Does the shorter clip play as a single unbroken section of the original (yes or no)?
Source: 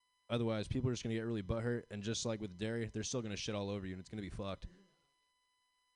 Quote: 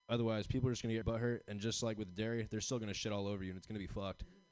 no